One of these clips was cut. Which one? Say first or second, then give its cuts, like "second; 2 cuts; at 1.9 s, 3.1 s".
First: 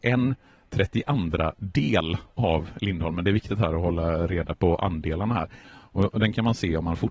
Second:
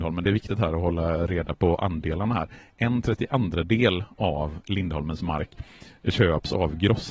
first; 1 cut; at 5.6 s